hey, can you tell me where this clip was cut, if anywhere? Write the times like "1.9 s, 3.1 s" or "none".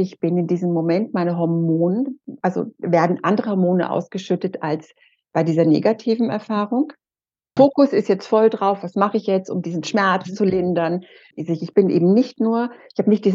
7.6 s, 11.3 s